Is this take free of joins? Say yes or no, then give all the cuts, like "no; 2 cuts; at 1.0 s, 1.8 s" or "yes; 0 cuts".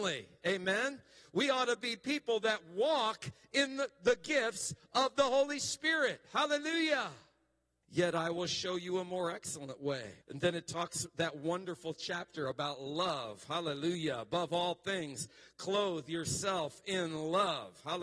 no; 2 cuts; at 7.8 s, 10.2 s